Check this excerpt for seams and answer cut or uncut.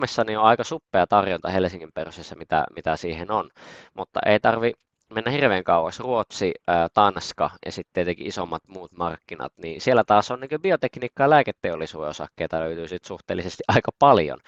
uncut